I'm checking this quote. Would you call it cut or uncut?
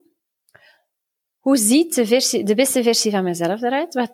uncut